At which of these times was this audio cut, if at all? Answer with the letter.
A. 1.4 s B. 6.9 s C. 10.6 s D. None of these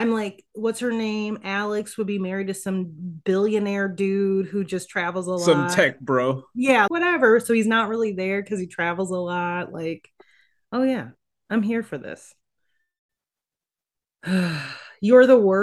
B